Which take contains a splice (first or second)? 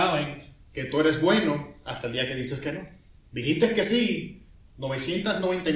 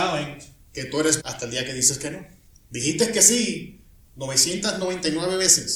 second